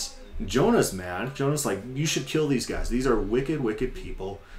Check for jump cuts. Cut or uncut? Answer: uncut